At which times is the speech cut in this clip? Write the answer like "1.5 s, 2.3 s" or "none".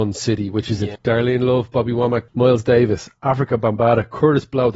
1.0 s, 2.3 s

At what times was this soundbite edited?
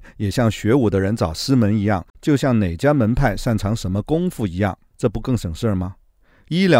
2.1 s, 4.9 s

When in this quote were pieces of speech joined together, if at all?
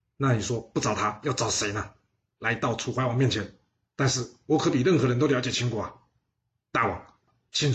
2.4 s, 3.8 s

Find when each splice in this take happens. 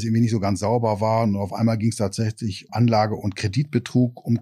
2.7 s

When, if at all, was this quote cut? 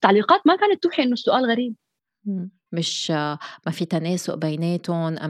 2.7 s

